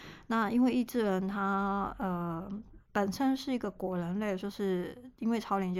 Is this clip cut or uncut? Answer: cut